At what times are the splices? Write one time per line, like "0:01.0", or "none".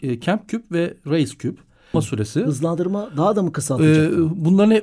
0:01.9